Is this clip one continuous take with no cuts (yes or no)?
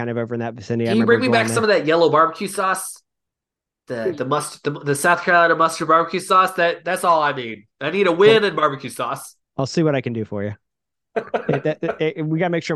yes